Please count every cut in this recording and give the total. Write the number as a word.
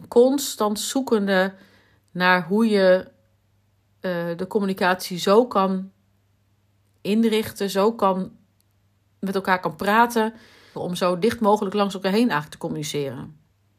one